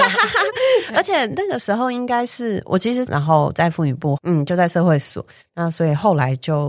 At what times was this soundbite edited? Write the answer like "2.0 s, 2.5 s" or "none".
3.1 s, 4.2 s, 5.4 s